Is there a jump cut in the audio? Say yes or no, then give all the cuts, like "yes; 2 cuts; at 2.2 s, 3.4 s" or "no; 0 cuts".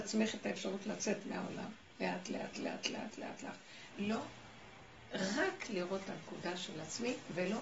yes; 1 cut; at 3.9 s